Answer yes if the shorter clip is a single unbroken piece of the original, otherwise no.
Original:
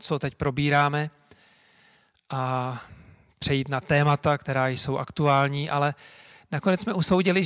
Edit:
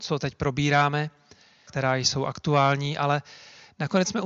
no